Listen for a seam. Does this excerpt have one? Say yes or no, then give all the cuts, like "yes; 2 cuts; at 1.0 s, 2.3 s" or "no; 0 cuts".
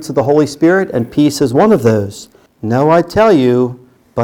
yes; 1 cut; at 2.5 s